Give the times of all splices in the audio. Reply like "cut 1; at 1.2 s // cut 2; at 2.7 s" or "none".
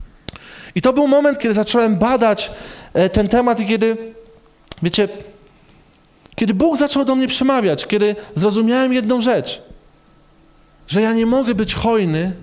cut 1; at 1.4 s

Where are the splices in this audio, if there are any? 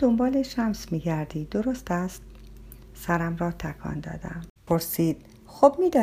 cut 1; at 4.6 s

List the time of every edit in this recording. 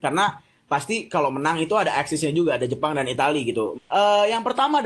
cut 1; at 3.7 s

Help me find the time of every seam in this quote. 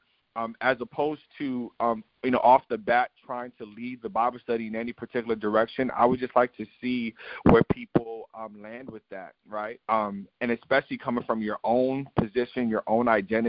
cut 1; at 9.8 s

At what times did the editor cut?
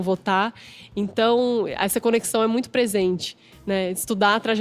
none

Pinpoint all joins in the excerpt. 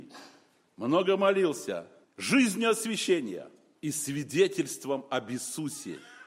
cut 1; at 2.0 s // cut 2; at 3.7 s

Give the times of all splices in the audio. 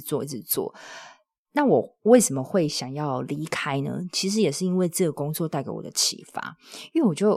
none

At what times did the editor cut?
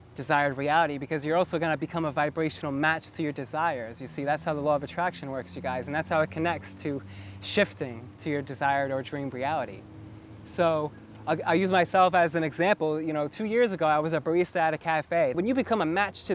cut 1; at 10.4 s // cut 2; at 15.3 s

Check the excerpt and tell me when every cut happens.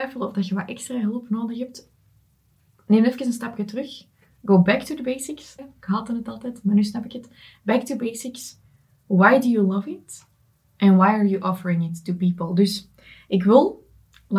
cut 1; at 5.6 s

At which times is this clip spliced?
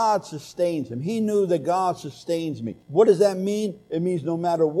cut 1; at 2.8 s

